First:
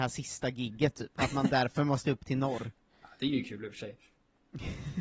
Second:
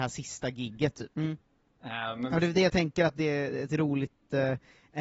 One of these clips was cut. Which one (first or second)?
second